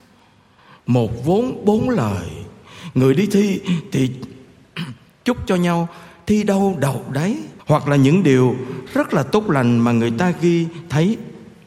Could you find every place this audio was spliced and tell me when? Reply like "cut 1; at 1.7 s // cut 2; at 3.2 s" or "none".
cut 1; at 7.6 s